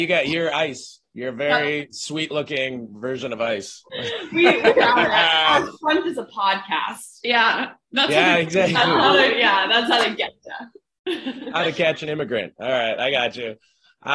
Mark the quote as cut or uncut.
uncut